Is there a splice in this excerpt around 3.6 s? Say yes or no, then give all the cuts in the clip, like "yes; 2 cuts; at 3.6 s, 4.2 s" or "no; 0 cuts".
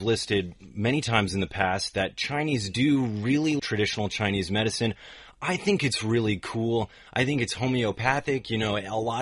yes; 1 cut; at 3.6 s